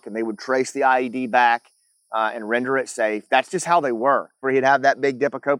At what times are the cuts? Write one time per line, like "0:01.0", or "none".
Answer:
0:04.4

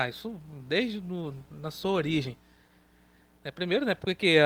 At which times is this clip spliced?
none

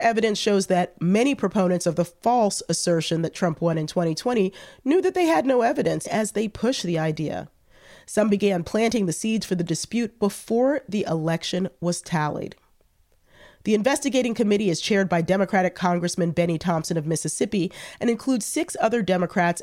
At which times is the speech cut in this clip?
0:06.0

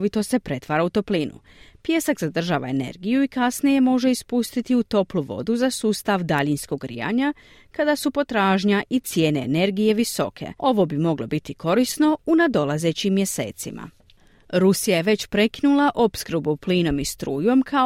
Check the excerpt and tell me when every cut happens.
0:10.6

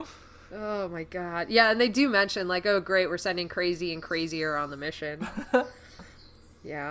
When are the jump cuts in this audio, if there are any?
none

